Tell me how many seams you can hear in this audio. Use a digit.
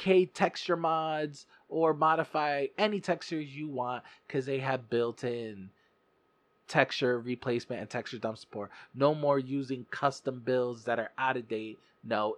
0